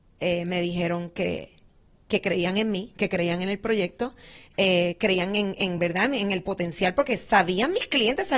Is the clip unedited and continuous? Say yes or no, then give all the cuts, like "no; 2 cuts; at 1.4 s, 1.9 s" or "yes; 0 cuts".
yes; 0 cuts